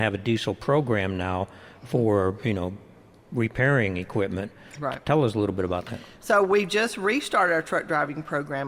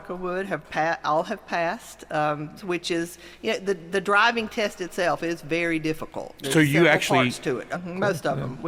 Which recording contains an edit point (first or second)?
second